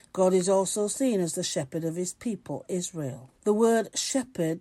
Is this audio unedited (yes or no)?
no